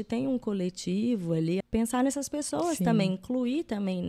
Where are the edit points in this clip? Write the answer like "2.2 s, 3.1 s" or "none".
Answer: 1.6 s